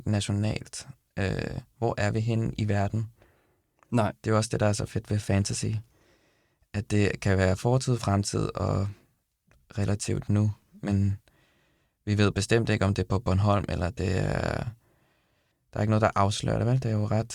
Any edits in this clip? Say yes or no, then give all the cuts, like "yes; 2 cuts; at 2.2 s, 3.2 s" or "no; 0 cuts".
no; 0 cuts